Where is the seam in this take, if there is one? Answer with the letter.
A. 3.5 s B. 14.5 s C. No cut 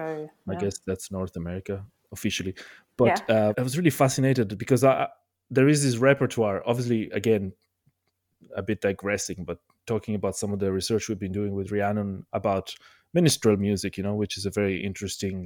A